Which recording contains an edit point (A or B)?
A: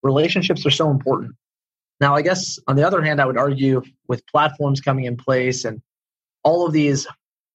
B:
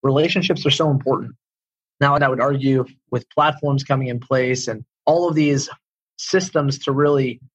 B